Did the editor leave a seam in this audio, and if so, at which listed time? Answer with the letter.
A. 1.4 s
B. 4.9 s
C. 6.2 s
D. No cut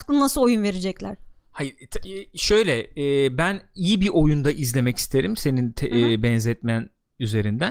D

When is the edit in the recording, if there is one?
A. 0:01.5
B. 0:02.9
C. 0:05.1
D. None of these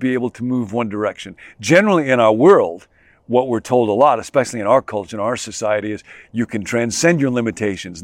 D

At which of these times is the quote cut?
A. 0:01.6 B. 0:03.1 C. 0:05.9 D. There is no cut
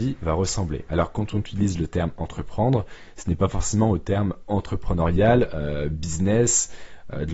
D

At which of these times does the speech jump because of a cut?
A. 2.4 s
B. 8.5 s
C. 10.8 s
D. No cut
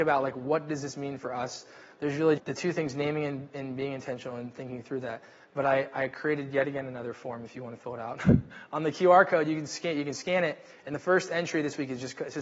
A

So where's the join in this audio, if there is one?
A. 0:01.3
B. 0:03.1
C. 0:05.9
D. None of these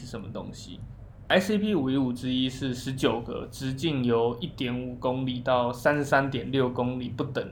A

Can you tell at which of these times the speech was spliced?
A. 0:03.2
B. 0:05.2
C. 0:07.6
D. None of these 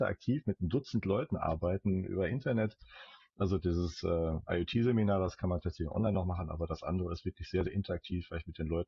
D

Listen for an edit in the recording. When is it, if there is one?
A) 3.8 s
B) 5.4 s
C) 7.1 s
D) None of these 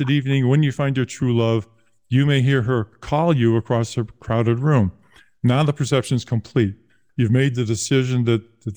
C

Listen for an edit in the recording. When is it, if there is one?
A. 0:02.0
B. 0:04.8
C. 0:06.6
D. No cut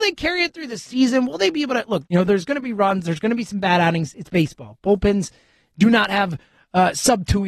A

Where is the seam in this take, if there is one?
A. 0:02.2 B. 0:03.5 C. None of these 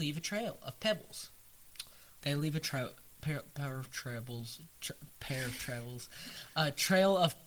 A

